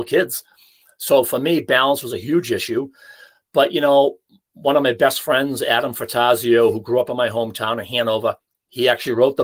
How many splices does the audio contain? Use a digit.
0